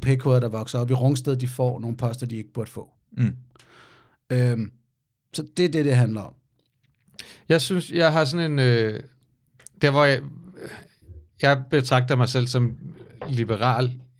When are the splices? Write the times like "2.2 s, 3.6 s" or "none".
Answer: none